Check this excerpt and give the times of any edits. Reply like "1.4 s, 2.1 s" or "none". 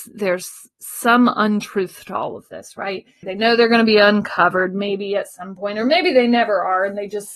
3.2 s